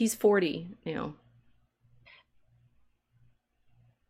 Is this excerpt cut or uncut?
uncut